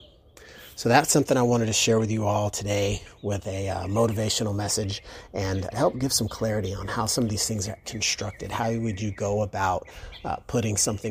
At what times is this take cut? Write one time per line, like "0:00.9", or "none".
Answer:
0:05.7
0:07.8